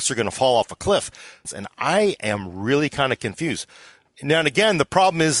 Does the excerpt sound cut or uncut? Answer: cut